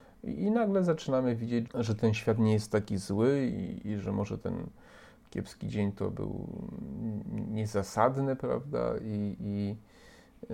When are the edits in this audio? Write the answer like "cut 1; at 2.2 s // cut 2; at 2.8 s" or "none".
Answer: cut 1; at 1.7 s

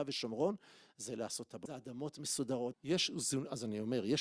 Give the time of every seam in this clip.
cut 1; at 1.7 s // cut 2; at 2.7 s

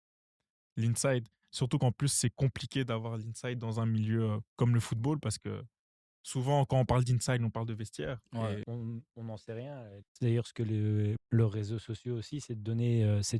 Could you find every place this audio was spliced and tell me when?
cut 1; at 8.6 s // cut 2; at 10.0 s // cut 3; at 11.2 s

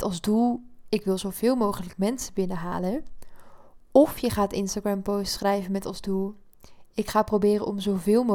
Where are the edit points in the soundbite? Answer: none

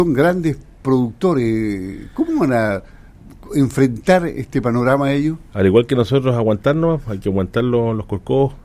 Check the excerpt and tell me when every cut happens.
none

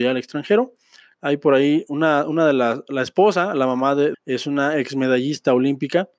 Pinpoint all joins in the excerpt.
cut 1; at 1.1 s // cut 2; at 4.1 s

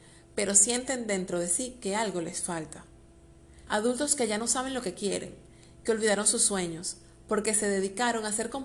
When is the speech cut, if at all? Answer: cut 1; at 3.7 s

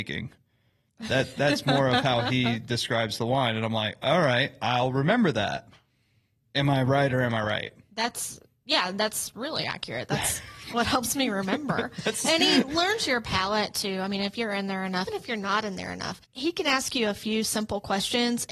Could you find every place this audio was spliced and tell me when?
cut 1; at 15.1 s // cut 2; at 16.2 s

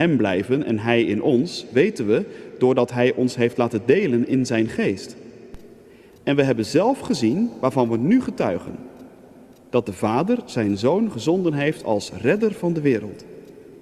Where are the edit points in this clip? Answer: none

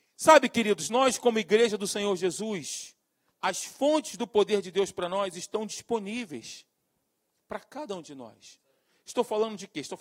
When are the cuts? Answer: cut 1; at 3.3 s

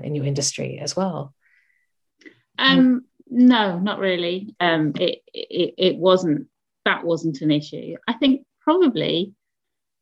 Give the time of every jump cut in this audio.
cut 1; at 2.5 s // cut 2; at 4.6 s

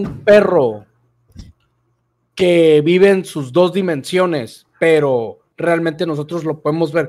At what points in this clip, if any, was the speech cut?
none

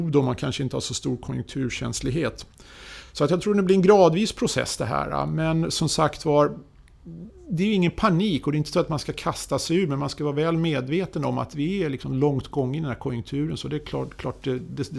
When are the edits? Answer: none

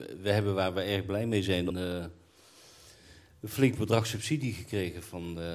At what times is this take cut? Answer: cut 1; at 1.7 s

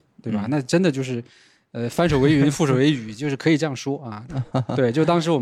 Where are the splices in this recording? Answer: cut 1; at 4.3 s

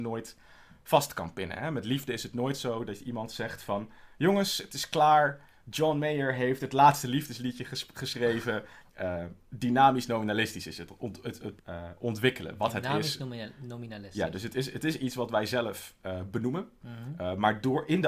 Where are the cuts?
cut 1; at 8.9 s // cut 2; at 11.6 s

